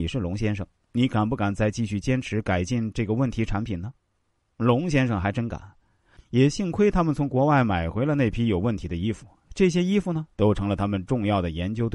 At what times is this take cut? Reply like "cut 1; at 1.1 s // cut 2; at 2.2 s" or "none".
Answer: cut 1; at 6.2 s